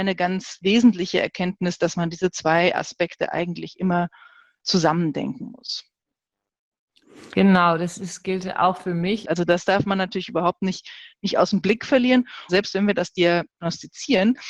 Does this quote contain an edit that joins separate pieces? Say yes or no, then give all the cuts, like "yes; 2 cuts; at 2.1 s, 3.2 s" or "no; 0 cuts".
yes; 3 cuts; at 4.6 s, 9.2 s, 12.5 s